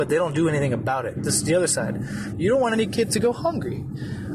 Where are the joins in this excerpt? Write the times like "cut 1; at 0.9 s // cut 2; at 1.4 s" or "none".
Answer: cut 1; at 1.1 s // cut 2; at 2.3 s